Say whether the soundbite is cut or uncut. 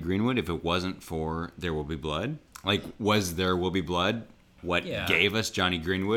uncut